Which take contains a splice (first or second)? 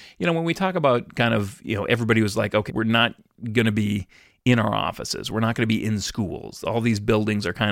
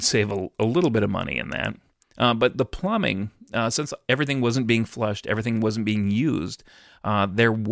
first